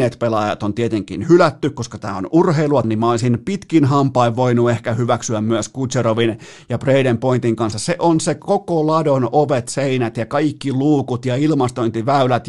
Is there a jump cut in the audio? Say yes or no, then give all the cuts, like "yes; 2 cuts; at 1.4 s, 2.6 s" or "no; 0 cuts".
yes; 2 cuts; at 2.8 s, 7.7 s